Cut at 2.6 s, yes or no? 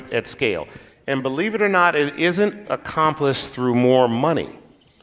yes